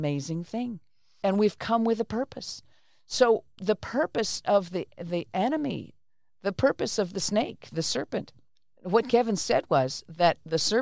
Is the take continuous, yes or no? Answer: yes